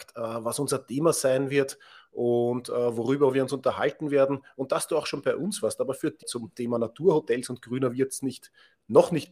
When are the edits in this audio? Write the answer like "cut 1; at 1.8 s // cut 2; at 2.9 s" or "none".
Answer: cut 1; at 6.2 s